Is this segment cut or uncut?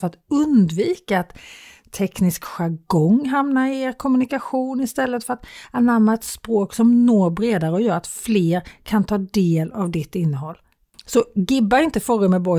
cut